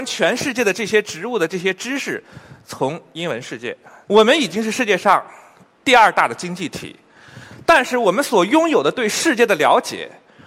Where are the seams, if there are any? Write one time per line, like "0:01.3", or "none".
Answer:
0:04.1